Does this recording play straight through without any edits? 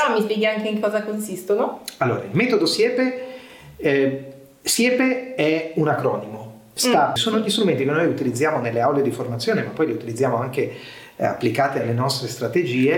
no; 1 cut; at 7.2 s

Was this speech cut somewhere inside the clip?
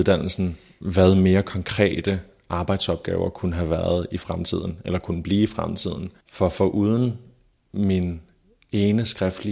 yes; 1 cut; at 6.2 s

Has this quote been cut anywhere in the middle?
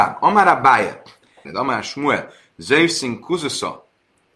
yes; 1 cut; at 1.4 s

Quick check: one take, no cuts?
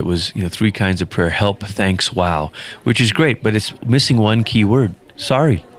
yes; 0 cuts

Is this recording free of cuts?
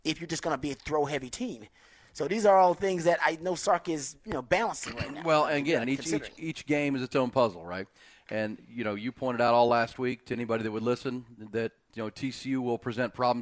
yes; 0 cuts

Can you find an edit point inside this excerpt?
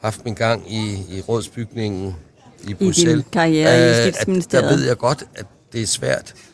no; 0 cuts

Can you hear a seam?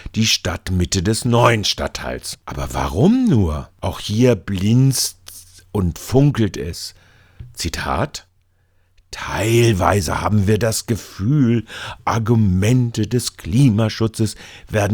no; 0 cuts

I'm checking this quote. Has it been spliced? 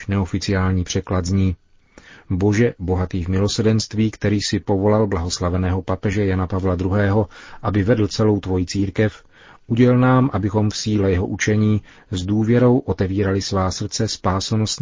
no; 0 cuts

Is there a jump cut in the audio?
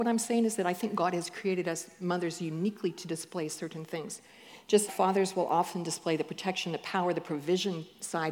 yes; 1 cut; at 4.9 s

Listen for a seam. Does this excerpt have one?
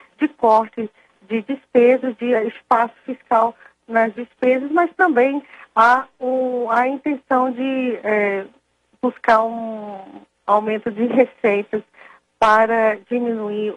no; 0 cuts

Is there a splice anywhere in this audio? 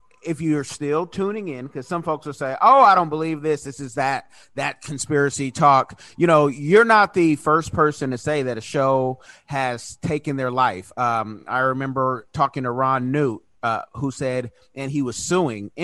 no; 0 cuts

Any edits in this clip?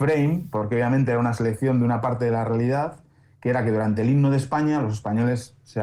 no; 0 cuts

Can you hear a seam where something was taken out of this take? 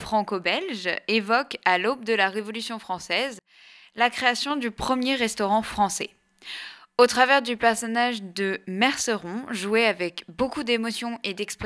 no; 0 cuts

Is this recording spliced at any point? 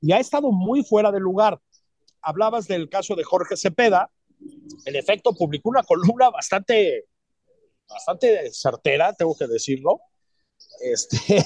no; 0 cuts

